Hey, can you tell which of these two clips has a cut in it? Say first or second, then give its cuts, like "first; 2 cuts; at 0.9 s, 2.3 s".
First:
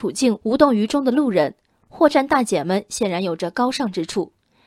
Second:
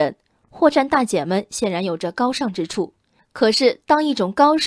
second; 1 cut; at 3.2 s